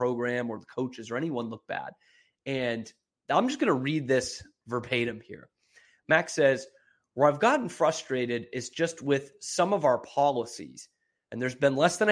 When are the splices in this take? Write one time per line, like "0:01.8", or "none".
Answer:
none